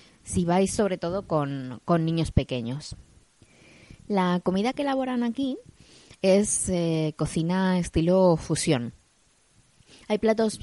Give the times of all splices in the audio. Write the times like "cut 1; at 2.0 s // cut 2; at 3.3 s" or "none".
none